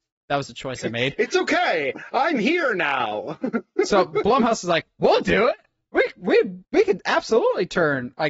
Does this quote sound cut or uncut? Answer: cut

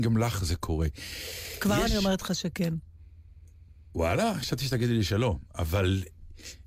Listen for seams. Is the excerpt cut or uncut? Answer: uncut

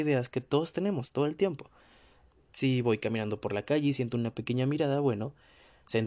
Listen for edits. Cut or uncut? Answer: uncut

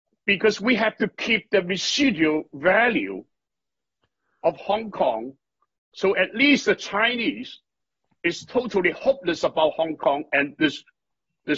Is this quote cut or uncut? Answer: uncut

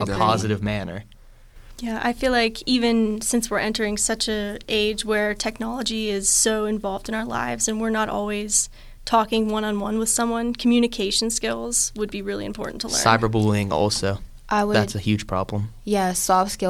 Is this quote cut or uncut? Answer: uncut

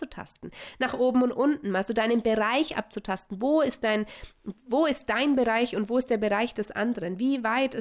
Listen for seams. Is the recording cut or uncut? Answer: uncut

